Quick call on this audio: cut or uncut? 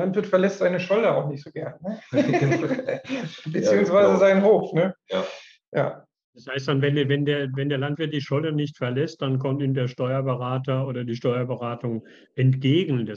uncut